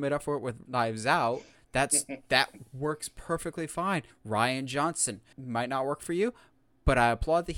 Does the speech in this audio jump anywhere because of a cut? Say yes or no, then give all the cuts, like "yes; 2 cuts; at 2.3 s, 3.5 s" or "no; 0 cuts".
yes; 2 cuts; at 4.1 s, 5.3 s